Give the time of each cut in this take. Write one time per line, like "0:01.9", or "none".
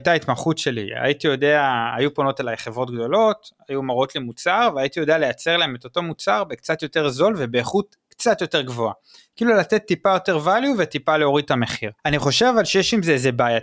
0:12.0